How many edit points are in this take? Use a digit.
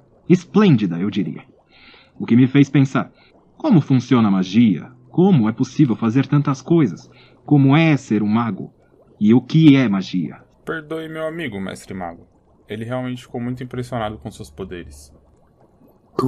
0